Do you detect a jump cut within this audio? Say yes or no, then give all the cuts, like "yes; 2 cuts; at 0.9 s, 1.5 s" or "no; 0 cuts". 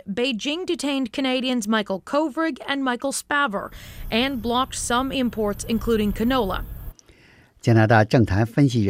yes; 1 cut; at 6.9 s